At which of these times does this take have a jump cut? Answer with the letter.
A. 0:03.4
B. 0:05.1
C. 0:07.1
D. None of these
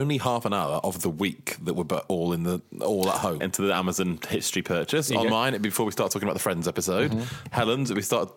A